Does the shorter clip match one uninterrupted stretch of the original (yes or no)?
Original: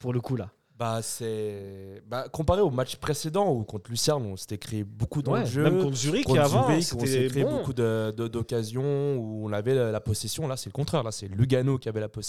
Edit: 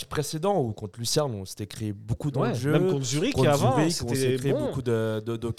yes